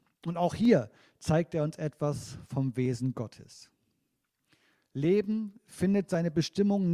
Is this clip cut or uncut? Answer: uncut